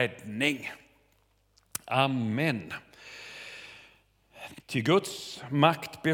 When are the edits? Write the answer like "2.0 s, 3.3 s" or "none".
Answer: 4.6 s